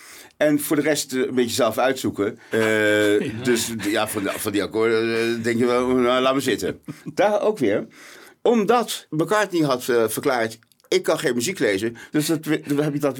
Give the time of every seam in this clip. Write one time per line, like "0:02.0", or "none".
0:02.5